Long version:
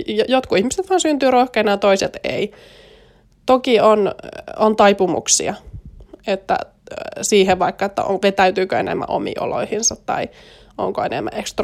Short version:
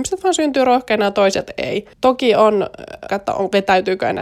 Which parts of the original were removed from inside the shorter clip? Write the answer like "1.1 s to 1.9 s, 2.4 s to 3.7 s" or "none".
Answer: 2.6 s to 3.4 s, 4.5 s to 7.8 s